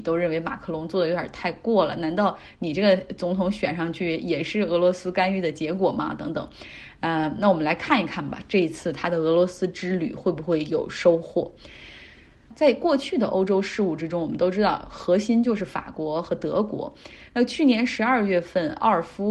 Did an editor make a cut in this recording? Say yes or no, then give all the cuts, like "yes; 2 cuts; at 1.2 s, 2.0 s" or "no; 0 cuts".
no; 0 cuts